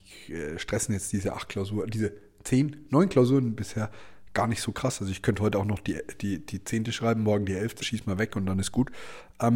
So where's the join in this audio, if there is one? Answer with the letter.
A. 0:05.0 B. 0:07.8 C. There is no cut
B